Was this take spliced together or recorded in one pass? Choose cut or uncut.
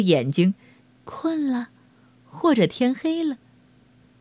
cut